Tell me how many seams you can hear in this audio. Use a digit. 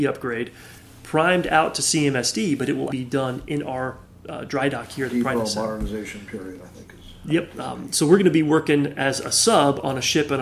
1